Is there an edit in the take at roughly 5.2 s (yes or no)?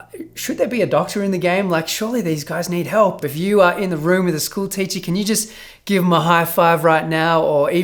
no